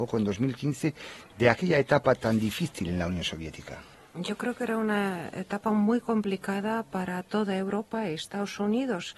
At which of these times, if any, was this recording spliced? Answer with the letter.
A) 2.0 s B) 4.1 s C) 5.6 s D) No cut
B